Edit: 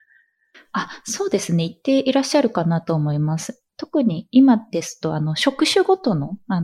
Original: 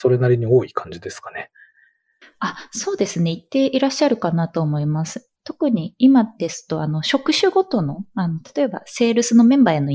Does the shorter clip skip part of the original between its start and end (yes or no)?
no